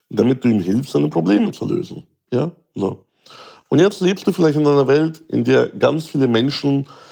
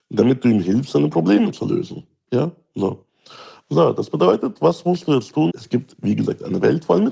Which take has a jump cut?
second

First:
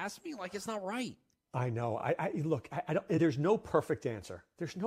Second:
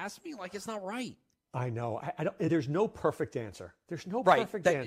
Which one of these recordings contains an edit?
second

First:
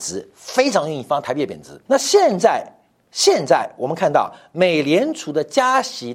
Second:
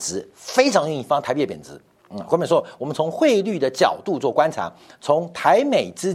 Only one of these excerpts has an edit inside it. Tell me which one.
first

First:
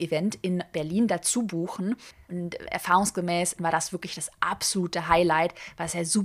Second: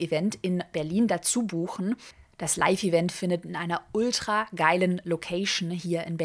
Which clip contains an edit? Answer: first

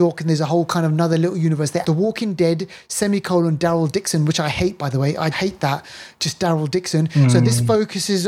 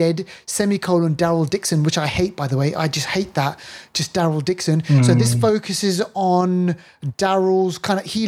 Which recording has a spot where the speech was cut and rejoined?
first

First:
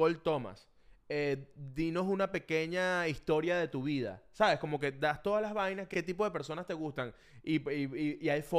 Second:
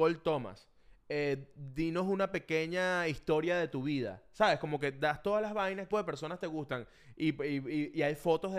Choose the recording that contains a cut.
second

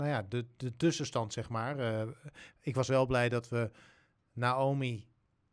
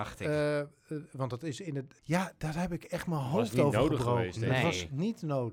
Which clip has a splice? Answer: second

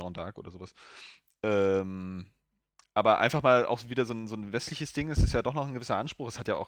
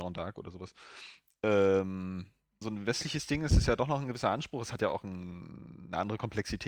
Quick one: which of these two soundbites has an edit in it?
second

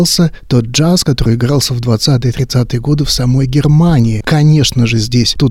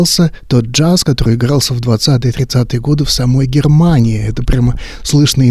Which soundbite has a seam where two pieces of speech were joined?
first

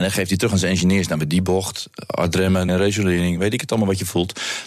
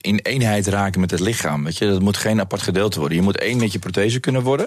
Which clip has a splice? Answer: first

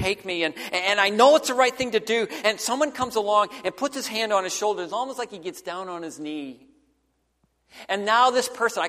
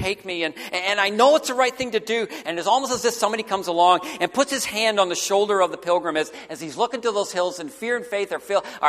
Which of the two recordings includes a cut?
second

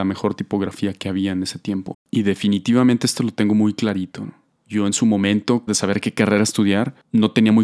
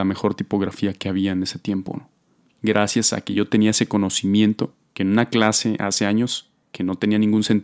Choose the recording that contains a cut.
first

